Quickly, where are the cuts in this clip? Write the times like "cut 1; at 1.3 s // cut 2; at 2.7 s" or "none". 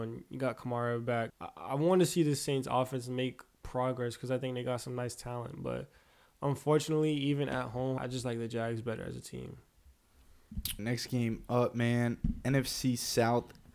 cut 1; at 1.3 s // cut 2; at 8.0 s // cut 3; at 10.8 s